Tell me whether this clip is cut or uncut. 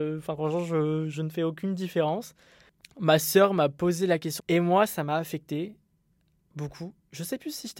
cut